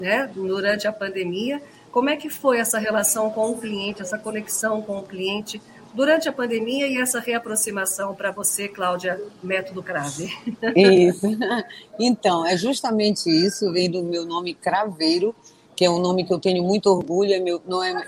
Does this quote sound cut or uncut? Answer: uncut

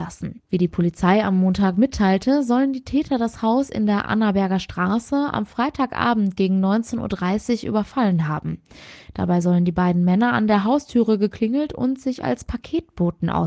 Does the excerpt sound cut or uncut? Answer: uncut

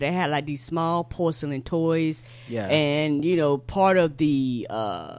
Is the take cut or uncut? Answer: uncut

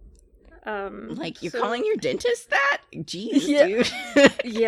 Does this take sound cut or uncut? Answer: uncut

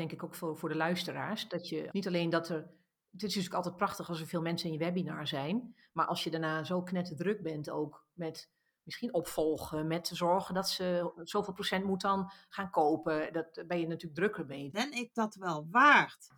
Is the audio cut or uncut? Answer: cut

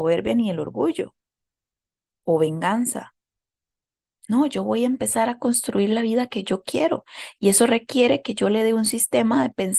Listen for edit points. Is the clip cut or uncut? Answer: uncut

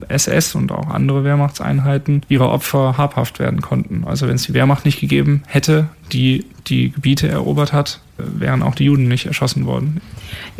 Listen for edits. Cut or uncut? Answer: cut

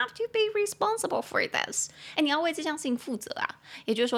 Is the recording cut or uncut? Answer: uncut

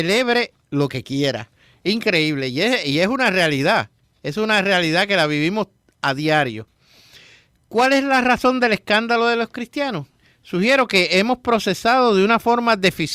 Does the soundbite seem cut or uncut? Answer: uncut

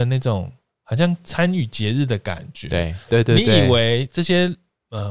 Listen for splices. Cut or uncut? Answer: cut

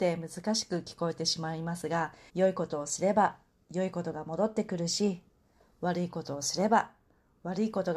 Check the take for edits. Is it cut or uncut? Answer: cut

